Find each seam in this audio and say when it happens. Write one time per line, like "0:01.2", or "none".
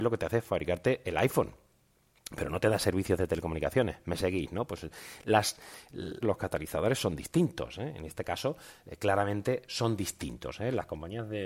0:06.2